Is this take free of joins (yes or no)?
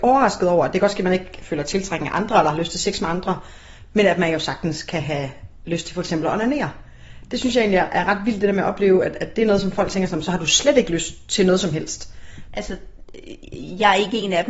no